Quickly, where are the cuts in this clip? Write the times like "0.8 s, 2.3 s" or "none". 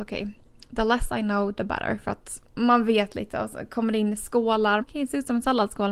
4.8 s